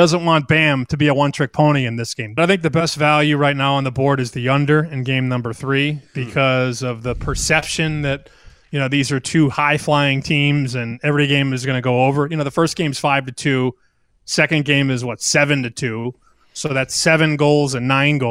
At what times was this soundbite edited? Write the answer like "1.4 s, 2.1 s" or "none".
2.4 s